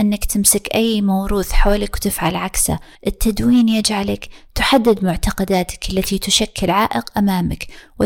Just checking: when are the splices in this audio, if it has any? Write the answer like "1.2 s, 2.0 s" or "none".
2.9 s